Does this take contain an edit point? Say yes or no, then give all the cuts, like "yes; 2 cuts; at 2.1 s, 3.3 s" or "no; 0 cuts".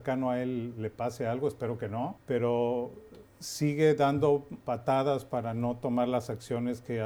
yes; 2 cuts; at 2.2 s, 4.6 s